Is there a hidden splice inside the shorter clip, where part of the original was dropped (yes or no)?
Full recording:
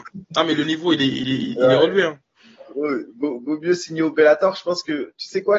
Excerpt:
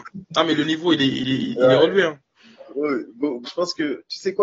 yes